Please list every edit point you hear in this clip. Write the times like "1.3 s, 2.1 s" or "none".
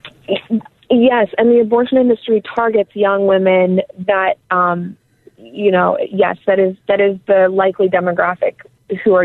none

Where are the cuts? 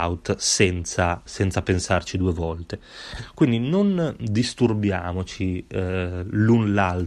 1.3 s

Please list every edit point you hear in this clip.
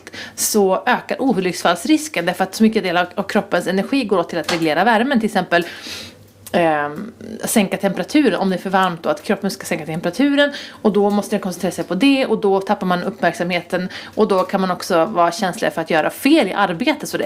none

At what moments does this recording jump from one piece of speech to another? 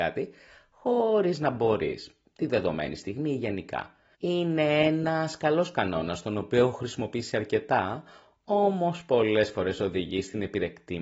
4.1 s

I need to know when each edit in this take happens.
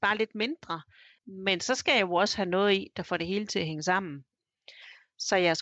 1.2 s

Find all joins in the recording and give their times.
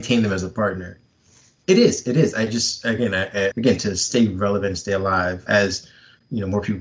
1.6 s, 3.5 s, 5.5 s

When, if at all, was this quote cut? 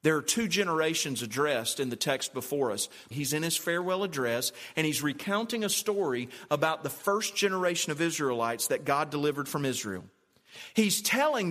3.1 s

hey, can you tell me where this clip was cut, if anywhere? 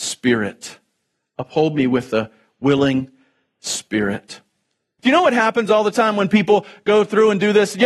5.0 s

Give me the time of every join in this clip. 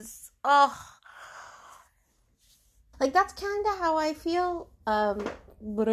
2.9 s

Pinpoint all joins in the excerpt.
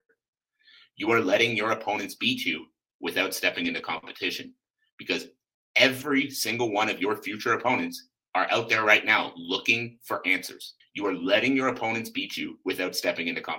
10.8 s

